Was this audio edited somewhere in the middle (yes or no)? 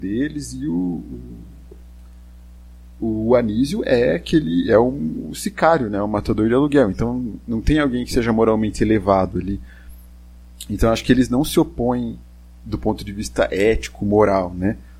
no